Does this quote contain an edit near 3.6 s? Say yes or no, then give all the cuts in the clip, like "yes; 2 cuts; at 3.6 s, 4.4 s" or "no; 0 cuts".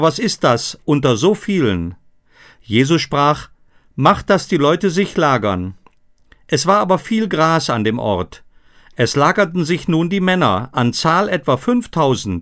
no; 0 cuts